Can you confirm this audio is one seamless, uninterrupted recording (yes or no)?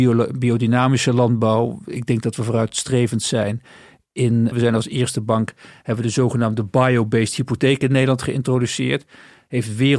no